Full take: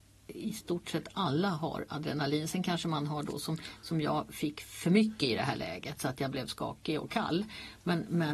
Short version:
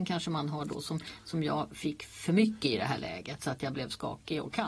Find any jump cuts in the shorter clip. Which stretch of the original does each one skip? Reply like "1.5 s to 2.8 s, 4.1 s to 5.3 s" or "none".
none